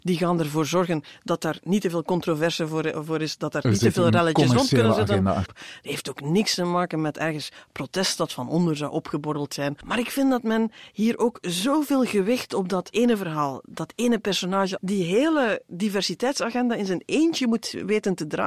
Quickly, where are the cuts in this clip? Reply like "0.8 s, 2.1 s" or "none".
5.5 s, 9.8 s, 14.8 s